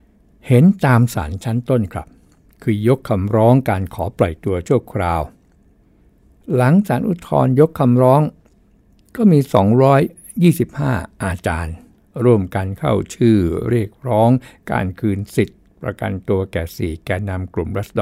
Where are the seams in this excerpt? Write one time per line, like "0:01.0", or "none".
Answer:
none